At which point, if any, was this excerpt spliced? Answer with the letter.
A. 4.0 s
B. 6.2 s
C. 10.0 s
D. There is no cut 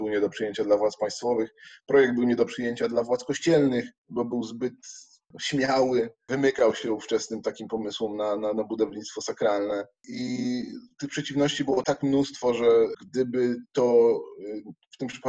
D